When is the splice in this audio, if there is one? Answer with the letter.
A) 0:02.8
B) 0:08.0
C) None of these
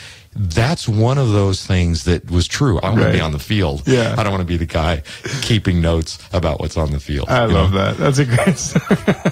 A